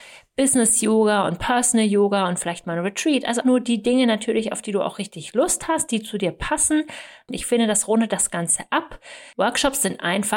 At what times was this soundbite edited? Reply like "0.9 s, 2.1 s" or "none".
3.4 s, 7.3 s, 9.3 s